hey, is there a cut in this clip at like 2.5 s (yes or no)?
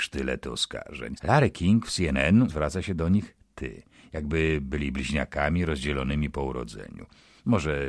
yes